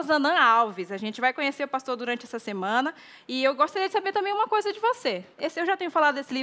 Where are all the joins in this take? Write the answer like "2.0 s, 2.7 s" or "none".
5.3 s